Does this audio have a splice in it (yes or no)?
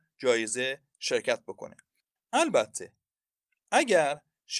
no